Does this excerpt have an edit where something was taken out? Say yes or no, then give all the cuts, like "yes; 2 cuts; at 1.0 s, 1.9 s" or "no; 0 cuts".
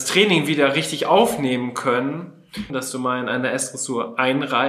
yes; 1 cut; at 2.7 s